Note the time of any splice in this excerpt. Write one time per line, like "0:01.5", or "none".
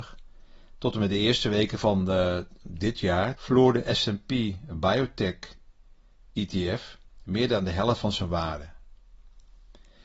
0:03.3